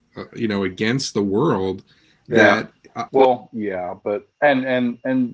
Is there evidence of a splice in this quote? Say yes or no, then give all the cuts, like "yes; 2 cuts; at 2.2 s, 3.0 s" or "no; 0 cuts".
yes; 2 cuts; at 3.1 s, 4.3 s